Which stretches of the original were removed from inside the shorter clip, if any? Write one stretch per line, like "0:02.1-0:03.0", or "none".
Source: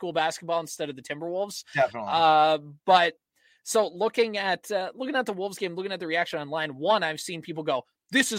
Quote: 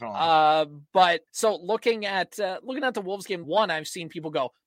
0:03.2-0:03.6
0:05.7-0:06.8